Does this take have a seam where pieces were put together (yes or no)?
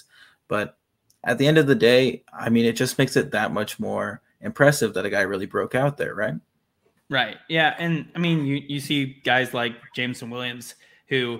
no